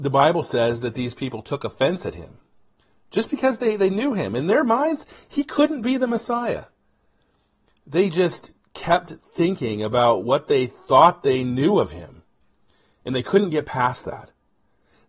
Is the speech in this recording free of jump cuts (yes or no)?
yes